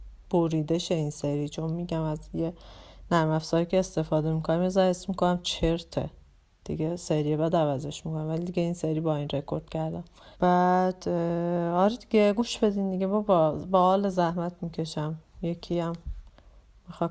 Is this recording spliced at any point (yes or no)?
yes